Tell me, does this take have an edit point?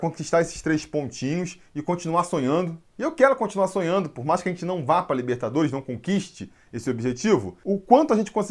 no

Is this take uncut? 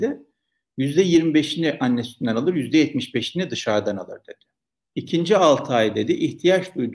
no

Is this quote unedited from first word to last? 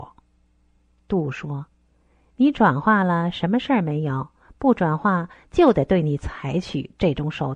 yes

